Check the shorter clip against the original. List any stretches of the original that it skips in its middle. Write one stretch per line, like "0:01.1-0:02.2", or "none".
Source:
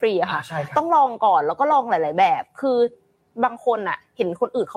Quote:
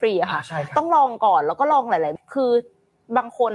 0:02.2-0:02.4

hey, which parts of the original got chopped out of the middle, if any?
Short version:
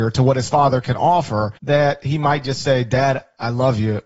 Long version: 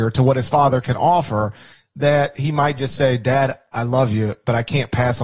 0:01.6-0:01.9

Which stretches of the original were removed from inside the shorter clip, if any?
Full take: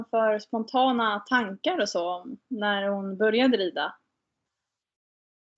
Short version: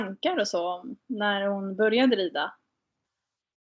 none

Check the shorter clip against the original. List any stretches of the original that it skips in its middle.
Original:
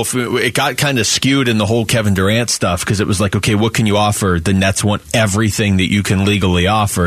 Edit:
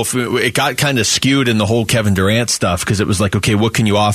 none

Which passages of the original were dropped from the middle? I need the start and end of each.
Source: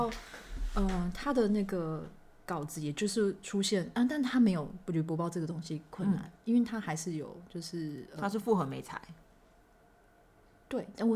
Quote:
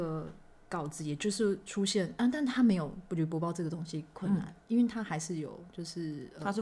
none

